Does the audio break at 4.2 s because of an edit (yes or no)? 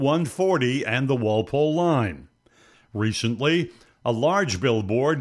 no